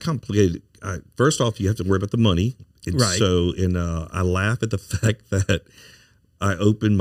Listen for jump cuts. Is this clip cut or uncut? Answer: uncut